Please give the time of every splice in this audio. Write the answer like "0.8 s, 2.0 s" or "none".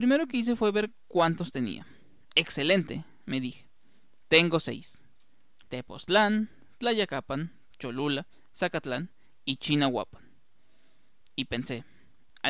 7.7 s